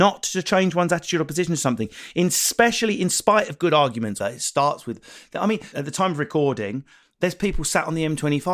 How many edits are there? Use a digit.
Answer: 2